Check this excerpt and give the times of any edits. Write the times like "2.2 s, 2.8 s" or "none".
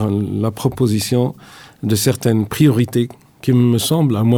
none